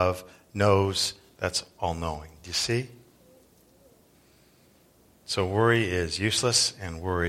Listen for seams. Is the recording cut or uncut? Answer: uncut